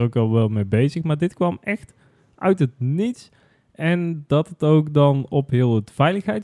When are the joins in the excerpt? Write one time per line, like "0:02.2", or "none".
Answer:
none